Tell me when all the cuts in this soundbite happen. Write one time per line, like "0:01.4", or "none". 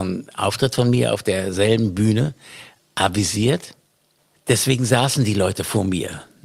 none